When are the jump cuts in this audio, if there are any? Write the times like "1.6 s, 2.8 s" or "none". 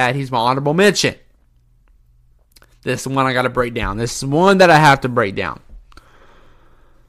none